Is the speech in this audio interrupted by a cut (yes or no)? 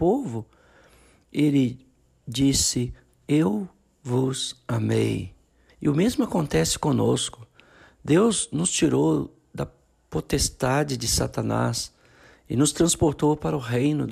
yes